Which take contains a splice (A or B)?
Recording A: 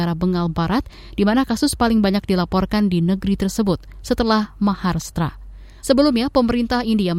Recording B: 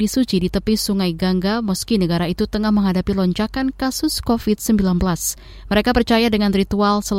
A